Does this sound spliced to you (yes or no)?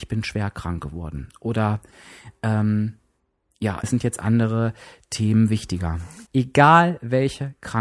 yes